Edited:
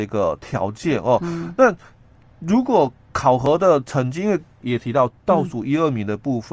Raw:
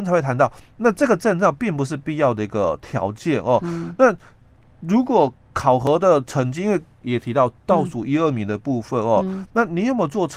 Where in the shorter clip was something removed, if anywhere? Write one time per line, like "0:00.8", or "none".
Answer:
none